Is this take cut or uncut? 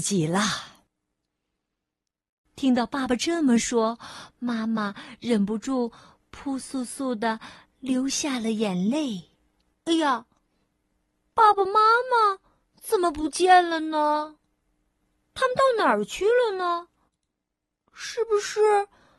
cut